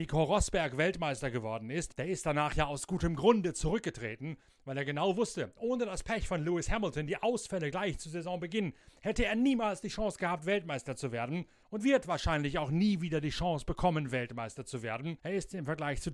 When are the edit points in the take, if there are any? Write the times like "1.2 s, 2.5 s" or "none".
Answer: 11.8 s, 15.2 s